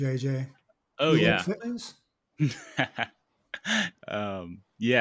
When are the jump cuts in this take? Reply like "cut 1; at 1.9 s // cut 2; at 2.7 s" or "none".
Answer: cut 1; at 1.6 s // cut 2; at 3.9 s